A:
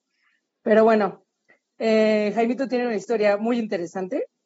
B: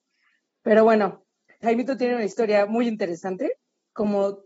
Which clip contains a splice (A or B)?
B